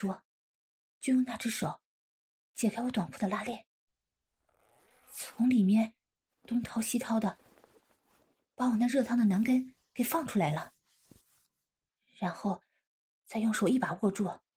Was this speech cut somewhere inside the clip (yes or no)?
no